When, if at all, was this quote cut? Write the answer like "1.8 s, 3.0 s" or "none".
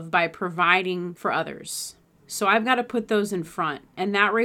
2.1 s